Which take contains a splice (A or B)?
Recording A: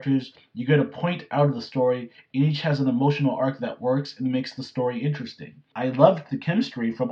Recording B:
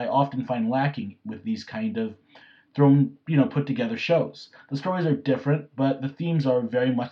A